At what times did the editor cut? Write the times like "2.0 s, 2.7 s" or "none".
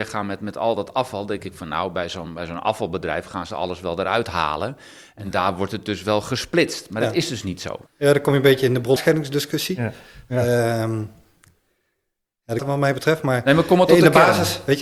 7.9 s, 9.0 s, 12.6 s